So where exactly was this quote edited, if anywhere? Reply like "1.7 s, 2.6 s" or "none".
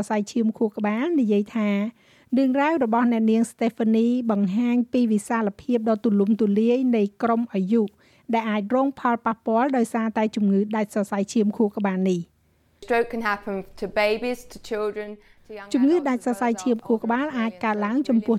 none